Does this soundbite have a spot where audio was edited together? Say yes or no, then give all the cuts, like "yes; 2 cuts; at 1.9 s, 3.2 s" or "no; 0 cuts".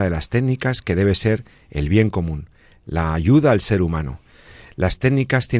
no; 0 cuts